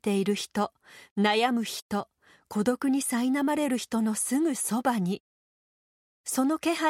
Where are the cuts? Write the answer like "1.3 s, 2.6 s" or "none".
none